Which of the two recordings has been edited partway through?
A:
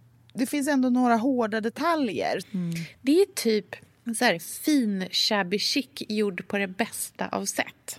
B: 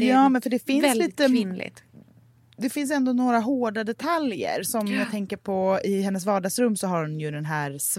A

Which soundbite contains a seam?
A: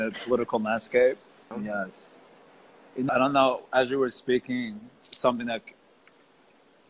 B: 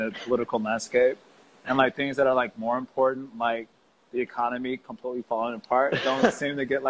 A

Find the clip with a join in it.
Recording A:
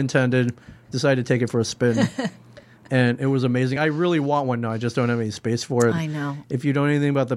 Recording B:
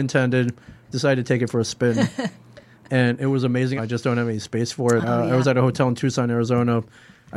B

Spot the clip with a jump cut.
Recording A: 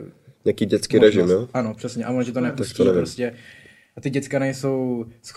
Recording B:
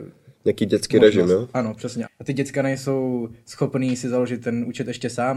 B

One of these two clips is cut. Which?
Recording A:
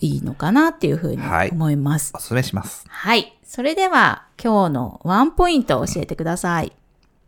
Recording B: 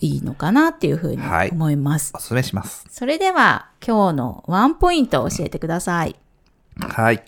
B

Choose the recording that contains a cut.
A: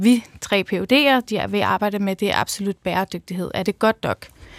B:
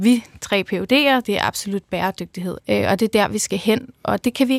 B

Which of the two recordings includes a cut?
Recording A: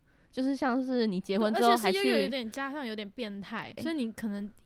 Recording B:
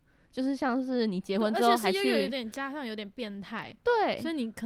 A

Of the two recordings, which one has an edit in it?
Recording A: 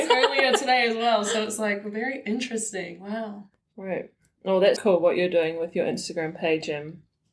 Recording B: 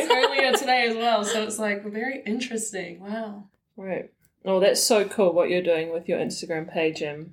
A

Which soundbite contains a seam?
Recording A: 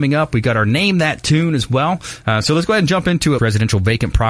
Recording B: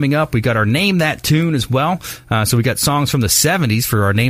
A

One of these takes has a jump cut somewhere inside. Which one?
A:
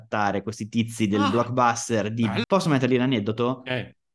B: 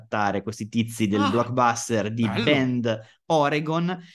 A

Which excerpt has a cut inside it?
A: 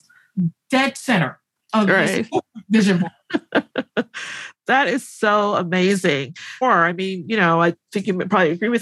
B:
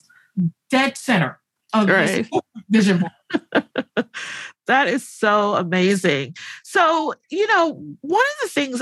A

